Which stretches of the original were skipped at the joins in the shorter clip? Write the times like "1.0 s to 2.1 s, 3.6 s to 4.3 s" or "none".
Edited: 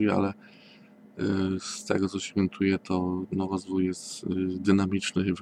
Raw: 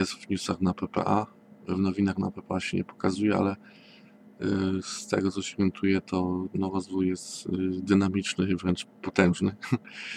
none